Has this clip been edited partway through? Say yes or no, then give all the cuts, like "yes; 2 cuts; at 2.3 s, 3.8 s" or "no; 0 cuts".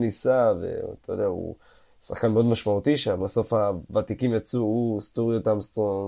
yes; 1 cut; at 3.2 s